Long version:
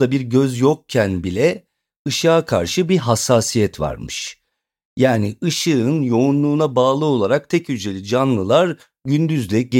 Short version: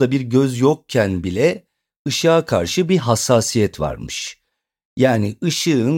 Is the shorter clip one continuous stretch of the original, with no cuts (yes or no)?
yes